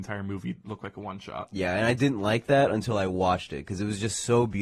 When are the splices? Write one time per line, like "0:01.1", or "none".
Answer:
none